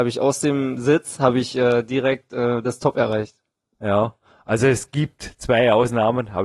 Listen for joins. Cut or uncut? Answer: uncut